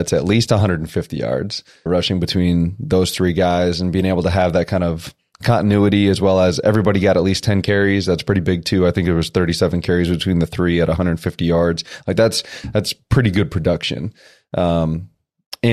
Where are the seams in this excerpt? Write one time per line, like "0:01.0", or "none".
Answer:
0:01.9